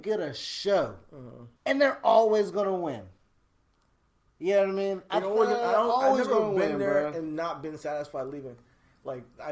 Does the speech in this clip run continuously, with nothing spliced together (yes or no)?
no